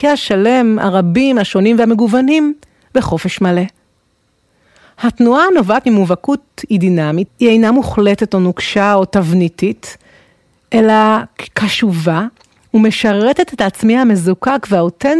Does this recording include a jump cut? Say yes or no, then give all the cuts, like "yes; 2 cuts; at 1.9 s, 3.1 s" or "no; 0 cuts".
yes; 1 cut; at 7.3 s